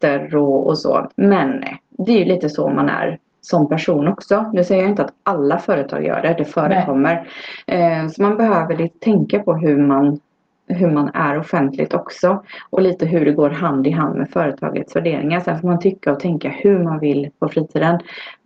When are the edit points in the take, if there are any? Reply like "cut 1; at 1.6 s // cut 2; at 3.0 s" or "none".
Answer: cut 1; at 1.1 s

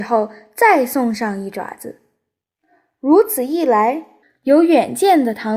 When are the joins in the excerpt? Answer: none

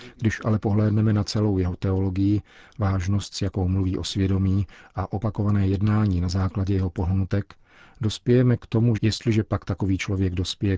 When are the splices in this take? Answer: cut 1; at 9.0 s

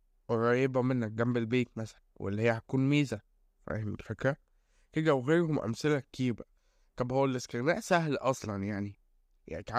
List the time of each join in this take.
none

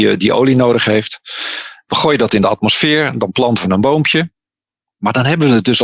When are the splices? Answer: none

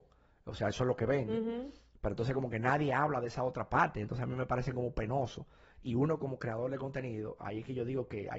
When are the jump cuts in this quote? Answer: none

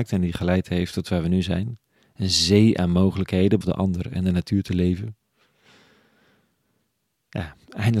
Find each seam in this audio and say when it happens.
cut 1; at 3.6 s

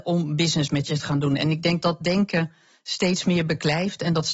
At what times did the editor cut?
cut 1; at 1.8 s

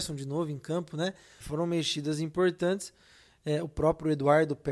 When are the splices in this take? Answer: cut 1; at 1.4 s

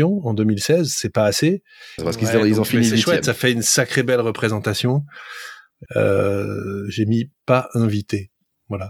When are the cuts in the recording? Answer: cut 1; at 2.0 s // cut 2; at 5.9 s

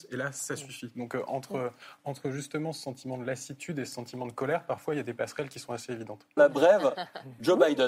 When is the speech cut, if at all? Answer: cut 1; at 6.4 s

